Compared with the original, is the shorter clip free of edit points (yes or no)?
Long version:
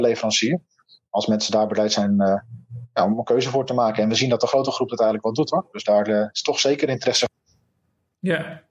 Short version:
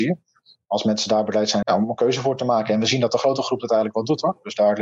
no